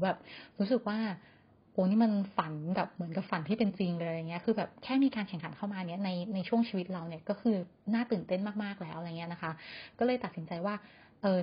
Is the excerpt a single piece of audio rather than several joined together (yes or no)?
yes